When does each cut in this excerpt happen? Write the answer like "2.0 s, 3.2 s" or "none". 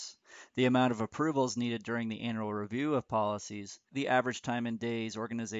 3.9 s